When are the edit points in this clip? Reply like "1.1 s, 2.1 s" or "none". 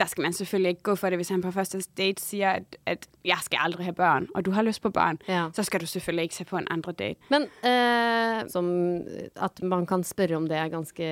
7.2 s, 8.5 s